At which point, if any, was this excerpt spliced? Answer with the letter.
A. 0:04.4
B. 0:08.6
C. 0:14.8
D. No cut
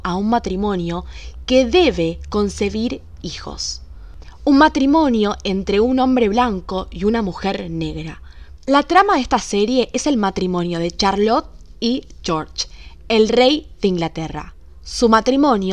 B